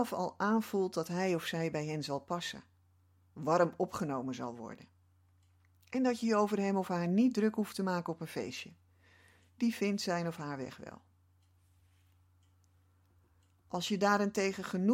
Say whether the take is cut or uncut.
uncut